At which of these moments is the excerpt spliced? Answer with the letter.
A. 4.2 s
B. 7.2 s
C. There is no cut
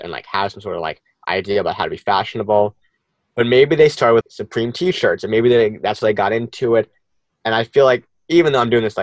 A